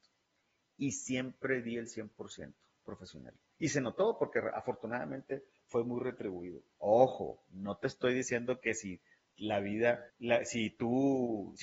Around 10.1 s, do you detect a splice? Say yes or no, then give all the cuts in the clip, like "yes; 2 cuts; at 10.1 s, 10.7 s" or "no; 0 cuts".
yes; 2 cuts; at 6.8 s, 10.1 s